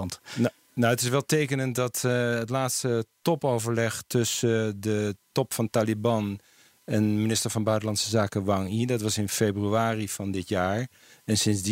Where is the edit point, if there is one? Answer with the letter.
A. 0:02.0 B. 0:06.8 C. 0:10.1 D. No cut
D